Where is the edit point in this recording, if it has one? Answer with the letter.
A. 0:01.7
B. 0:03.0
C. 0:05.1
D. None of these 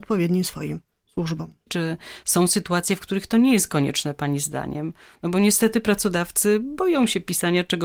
A